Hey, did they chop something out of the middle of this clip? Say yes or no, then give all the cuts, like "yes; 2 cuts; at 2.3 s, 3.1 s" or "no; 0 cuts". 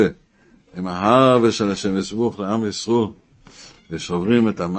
no; 0 cuts